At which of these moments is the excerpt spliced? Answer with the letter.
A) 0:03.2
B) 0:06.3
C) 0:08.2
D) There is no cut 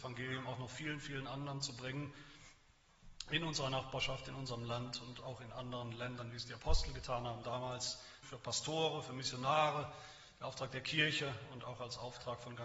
C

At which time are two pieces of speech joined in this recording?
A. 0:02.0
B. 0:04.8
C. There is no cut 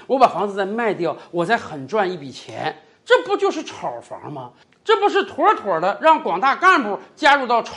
C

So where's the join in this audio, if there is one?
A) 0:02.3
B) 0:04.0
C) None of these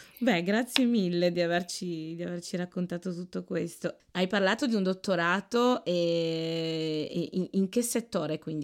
B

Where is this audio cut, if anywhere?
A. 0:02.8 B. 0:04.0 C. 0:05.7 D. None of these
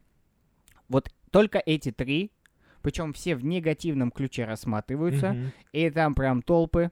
D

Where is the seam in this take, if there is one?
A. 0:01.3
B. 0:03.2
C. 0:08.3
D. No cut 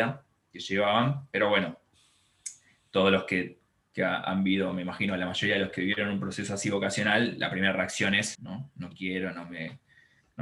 C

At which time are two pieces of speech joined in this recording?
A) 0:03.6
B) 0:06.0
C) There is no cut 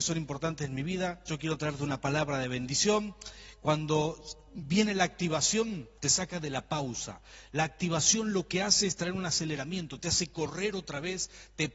B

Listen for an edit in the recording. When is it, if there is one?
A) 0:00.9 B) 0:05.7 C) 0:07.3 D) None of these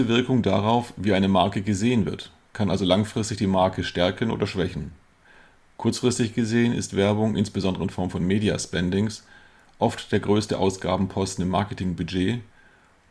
D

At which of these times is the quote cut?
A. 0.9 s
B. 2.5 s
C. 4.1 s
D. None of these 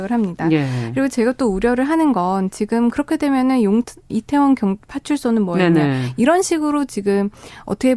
C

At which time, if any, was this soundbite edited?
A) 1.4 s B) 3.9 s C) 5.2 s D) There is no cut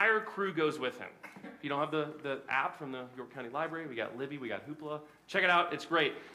A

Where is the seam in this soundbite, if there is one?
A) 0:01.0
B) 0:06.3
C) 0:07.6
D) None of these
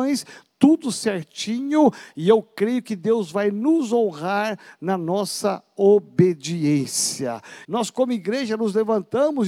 C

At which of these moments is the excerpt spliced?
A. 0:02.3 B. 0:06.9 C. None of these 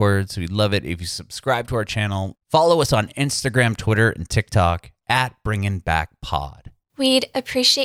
A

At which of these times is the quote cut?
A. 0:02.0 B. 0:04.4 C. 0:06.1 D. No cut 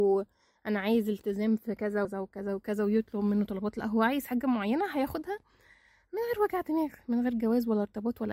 A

